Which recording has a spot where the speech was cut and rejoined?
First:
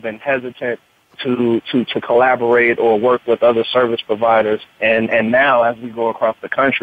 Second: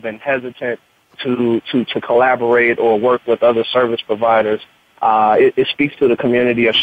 first; 1 cut; at 4.8 s

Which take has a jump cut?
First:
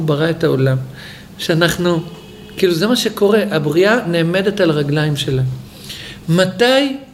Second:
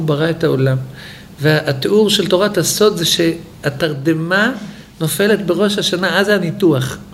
first; 1 cut; at 1.4 s

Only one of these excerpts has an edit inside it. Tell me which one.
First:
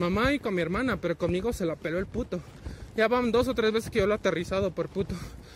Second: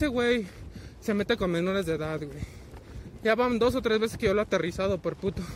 second; 1 cut; at 3.2 s

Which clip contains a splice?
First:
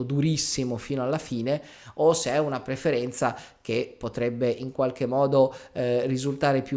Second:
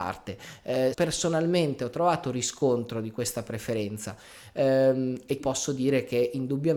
second; 2 cuts; at 0.9 s, 5.4 s

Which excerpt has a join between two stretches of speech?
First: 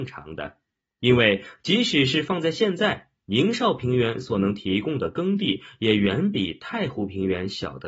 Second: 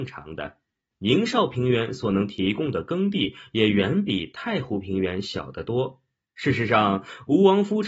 second; 2 cuts; at 0.9 s, 6.2 s

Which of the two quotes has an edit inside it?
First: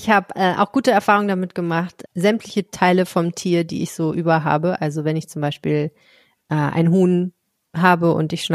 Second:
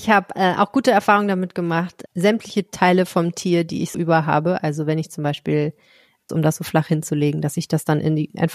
second; 2 cuts; at 3.9 s, 6.3 s

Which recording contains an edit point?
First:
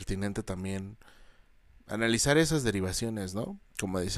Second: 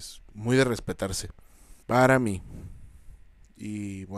second; 1 cut; at 1.8 s

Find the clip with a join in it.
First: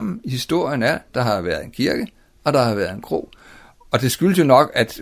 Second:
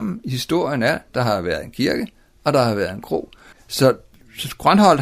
second; 1 cut; at 3.5 s

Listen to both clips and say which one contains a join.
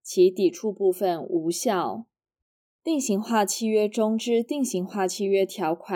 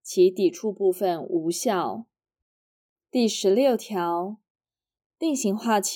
first; 1 cut; at 2.8 s

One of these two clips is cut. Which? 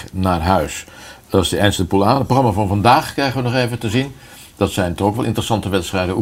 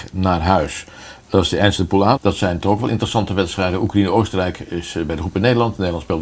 second; 1 cut; at 2.2 s

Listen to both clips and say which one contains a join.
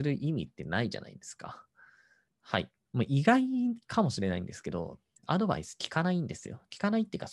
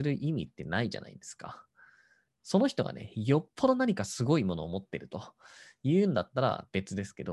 first; 2 cuts; at 2.3 s, 5.2 s

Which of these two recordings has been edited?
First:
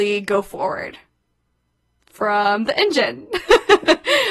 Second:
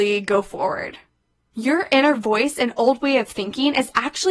second; 1 cut; at 1.5 s

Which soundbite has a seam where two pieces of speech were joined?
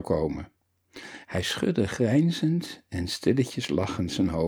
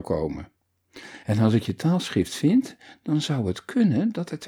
second; 1 cut; at 1.2 s

